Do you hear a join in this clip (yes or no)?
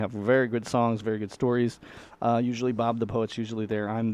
no